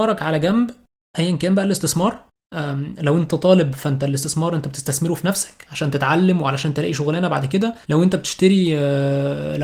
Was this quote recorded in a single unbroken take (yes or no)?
no